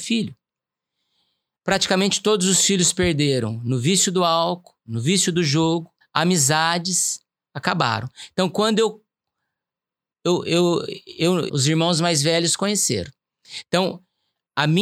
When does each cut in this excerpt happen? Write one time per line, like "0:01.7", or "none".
0:06.0
0:11.5